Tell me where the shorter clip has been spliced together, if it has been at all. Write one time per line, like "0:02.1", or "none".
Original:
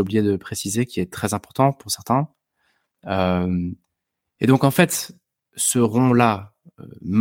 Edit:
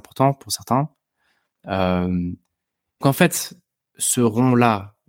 0:03.0

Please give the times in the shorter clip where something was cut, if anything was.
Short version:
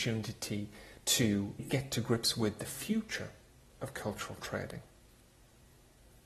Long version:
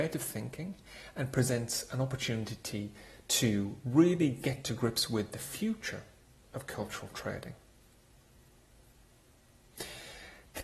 0:01.6

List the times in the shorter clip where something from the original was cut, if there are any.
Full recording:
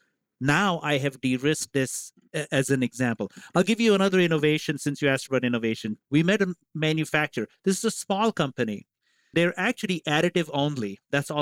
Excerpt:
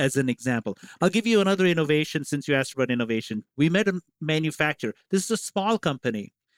none

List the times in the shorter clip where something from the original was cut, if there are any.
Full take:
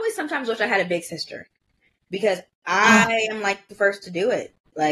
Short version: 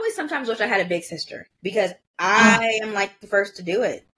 0:01.5

